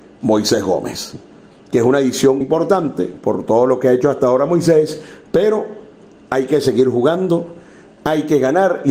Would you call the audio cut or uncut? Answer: cut